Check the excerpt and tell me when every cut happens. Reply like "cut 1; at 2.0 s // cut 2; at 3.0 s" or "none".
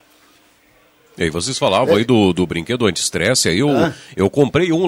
none